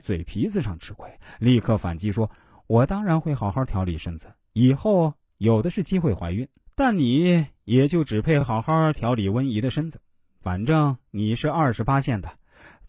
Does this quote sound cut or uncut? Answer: uncut